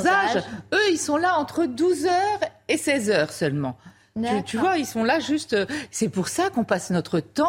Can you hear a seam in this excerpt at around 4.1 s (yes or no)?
no